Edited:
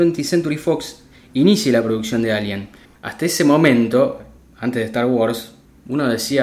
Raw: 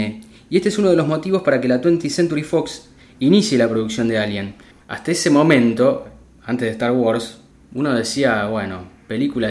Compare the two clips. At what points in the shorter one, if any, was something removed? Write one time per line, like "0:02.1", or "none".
none